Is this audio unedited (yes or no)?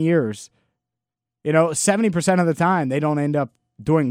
yes